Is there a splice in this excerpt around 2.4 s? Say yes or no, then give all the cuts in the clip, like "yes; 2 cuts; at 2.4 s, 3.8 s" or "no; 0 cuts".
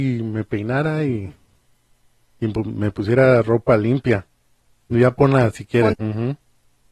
no; 2 cuts; at 4.8 s, 5.9 s